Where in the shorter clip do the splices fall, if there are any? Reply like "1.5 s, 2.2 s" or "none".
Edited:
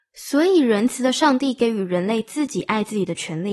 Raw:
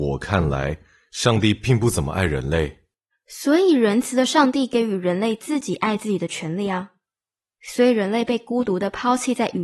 none